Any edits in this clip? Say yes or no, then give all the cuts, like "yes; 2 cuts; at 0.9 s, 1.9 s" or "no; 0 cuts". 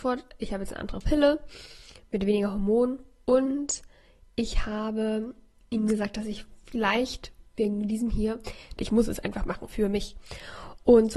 yes; 1 cut; at 8.8 s